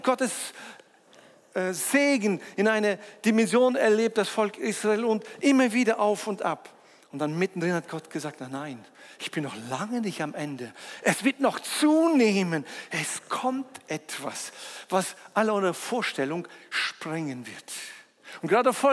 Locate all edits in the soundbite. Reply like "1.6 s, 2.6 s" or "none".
none